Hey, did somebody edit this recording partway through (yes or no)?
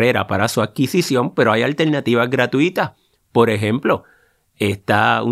no